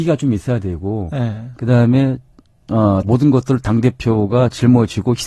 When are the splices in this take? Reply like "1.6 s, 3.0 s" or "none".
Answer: 3.0 s